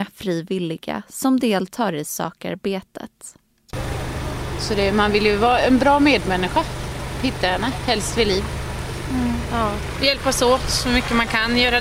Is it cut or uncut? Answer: uncut